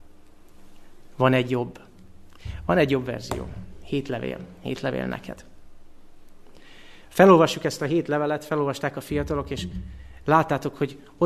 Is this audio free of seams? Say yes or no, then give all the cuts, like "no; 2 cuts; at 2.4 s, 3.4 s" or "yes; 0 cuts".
yes; 0 cuts